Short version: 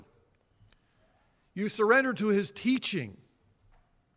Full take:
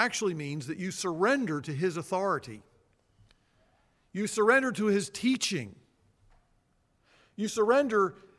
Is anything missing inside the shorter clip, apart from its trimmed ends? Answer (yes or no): no